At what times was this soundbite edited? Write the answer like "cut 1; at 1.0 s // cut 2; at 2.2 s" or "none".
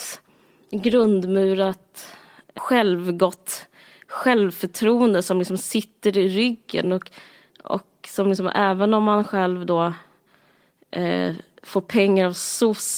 none